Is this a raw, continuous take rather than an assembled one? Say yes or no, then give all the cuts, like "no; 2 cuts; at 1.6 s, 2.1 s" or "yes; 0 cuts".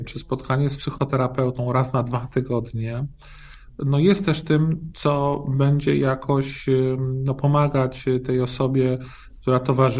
yes; 0 cuts